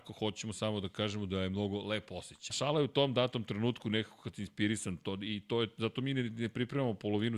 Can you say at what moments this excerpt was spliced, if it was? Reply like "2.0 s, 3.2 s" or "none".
2.5 s